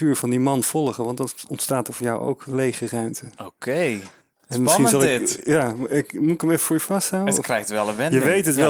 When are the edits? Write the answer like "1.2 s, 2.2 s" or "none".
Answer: none